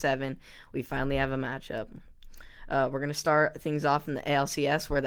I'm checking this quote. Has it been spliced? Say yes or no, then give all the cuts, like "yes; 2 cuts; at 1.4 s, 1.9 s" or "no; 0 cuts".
no; 0 cuts